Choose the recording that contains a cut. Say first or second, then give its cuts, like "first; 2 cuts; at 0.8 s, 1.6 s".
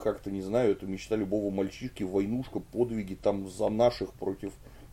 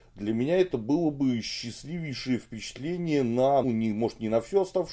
second; 1 cut; at 3.6 s